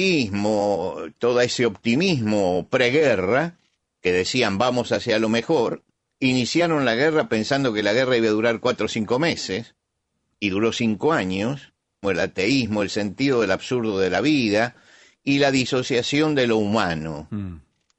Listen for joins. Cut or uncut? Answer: cut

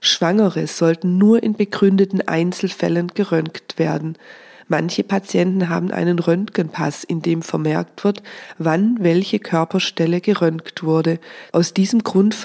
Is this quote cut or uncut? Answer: cut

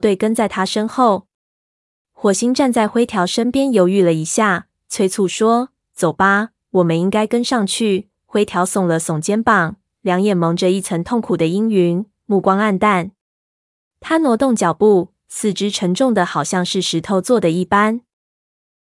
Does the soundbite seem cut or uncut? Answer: uncut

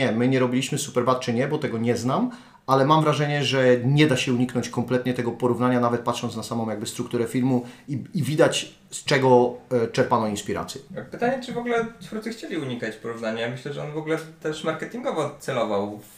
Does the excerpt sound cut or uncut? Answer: uncut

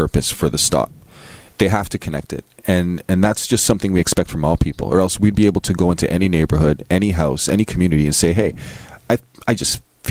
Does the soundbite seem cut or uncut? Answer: uncut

